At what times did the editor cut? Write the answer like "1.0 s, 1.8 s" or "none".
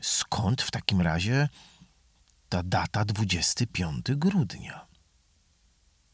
none